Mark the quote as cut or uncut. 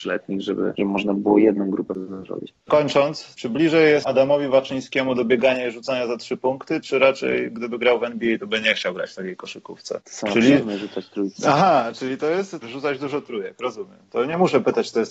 cut